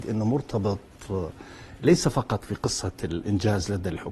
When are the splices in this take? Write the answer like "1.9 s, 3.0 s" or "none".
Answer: none